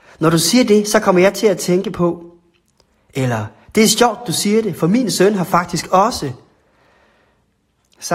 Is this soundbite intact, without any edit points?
yes; 0 cuts

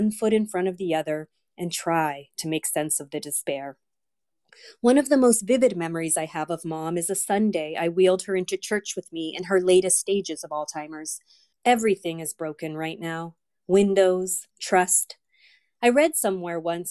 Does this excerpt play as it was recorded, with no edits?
no; 2 cuts; at 11.5 s, 14.5 s

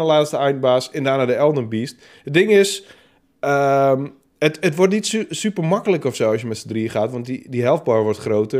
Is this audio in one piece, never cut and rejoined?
yes; 0 cuts

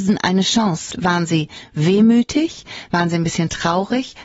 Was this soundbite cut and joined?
yes; 1 cut; at 0.9 s

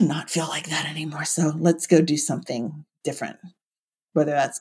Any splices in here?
no; 0 cuts

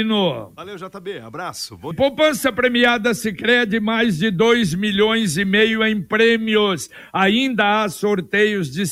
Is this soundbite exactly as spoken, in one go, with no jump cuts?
no; 1 cut; at 1.9 s

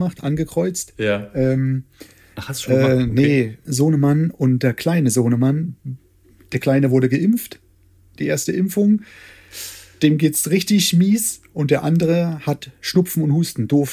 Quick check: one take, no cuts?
no; 1 cut; at 3.6 s

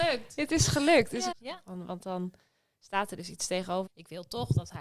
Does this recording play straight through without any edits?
no; 2 cuts; at 1.3 s, 3.9 s

